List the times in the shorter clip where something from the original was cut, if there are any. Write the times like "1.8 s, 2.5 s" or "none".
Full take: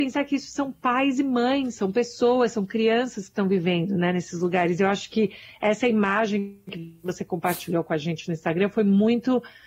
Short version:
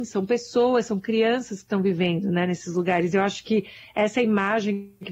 none